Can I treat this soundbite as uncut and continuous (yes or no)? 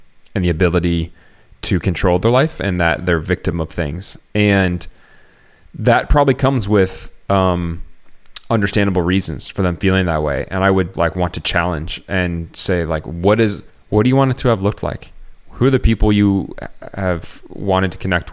no